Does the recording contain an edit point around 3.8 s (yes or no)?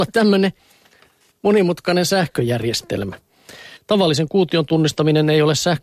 yes